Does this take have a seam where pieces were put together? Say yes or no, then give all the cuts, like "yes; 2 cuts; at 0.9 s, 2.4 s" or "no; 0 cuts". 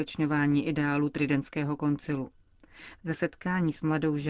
yes; 1 cut; at 3.0 s